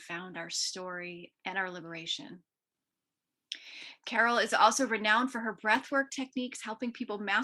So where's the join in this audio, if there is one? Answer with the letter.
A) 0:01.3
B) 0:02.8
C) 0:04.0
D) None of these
A